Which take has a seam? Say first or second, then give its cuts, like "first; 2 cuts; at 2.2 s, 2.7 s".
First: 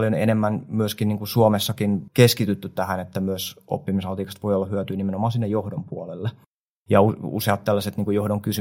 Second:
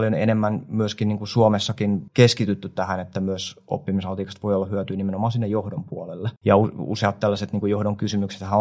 second; 1 cut; at 6.4 s